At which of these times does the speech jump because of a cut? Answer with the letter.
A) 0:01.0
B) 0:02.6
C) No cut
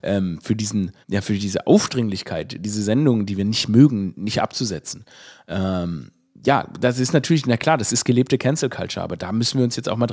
A